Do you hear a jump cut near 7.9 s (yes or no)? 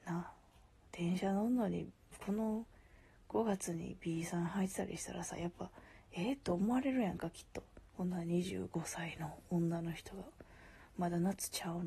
yes